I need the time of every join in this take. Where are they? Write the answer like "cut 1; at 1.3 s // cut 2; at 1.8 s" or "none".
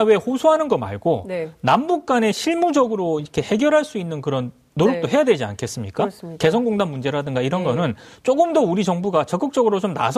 none